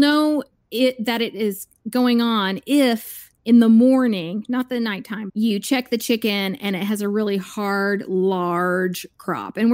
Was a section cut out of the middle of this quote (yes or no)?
yes